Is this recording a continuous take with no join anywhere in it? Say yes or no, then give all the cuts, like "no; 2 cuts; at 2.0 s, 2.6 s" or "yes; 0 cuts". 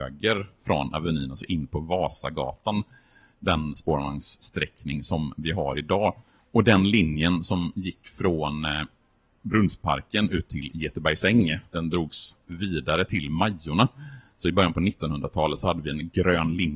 yes; 0 cuts